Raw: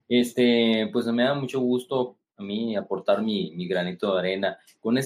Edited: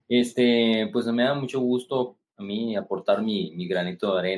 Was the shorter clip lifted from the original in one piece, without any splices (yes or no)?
yes